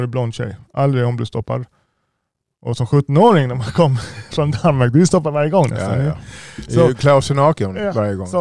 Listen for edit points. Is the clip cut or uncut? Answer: uncut